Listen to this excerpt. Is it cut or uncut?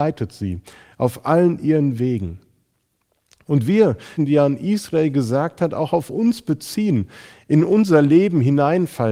cut